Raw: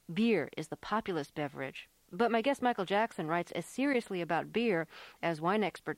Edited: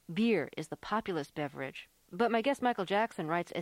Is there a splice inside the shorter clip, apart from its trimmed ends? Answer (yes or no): no